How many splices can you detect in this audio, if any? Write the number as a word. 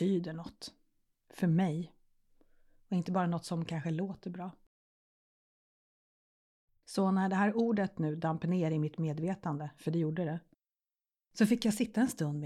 zero